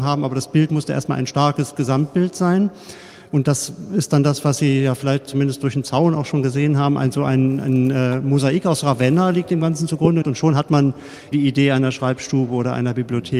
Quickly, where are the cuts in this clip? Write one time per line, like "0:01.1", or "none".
0:10.2
0:11.3